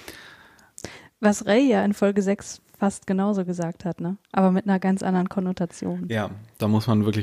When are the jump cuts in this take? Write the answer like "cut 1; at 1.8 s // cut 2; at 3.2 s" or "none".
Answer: none